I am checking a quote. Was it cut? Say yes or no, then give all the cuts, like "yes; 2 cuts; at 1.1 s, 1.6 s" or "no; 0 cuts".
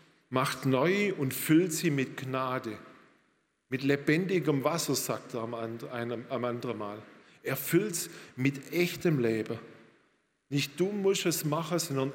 no; 0 cuts